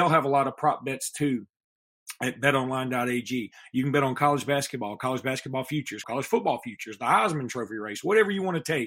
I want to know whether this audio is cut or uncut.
cut